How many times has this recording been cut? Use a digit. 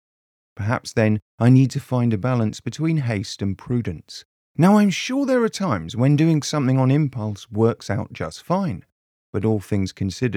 1